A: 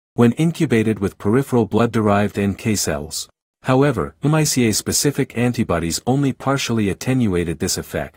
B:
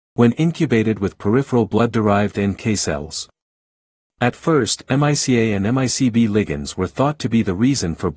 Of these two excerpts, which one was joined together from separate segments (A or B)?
A